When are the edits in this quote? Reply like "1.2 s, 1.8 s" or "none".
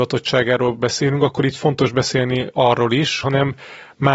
3.2 s